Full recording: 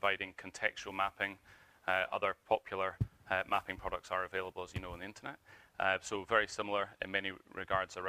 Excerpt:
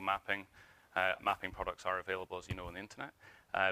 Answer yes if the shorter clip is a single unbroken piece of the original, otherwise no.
no